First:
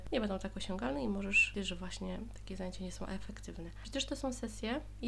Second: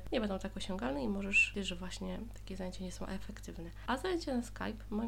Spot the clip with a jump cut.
first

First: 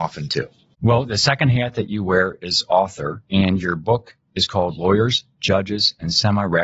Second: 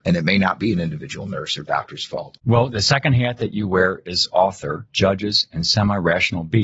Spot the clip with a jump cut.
second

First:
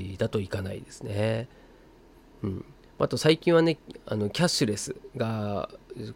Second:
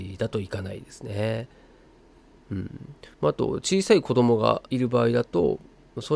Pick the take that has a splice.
second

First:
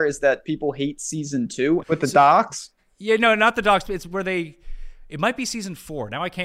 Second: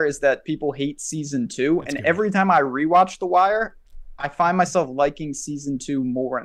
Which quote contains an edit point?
first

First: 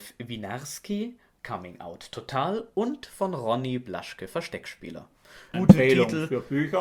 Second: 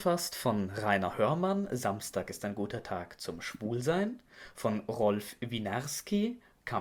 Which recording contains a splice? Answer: first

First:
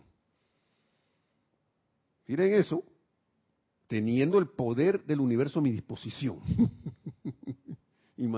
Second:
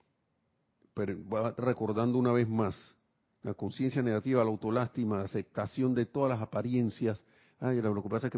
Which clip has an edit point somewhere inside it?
first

